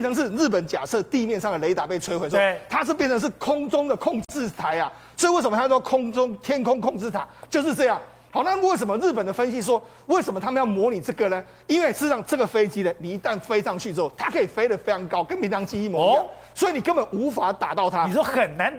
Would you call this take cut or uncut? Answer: uncut